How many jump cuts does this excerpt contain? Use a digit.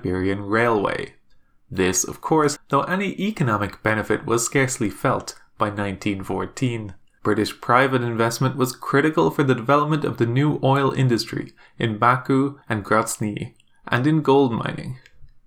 3